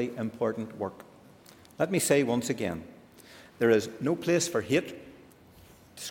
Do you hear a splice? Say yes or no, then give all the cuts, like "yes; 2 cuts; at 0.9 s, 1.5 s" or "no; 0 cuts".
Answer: no; 0 cuts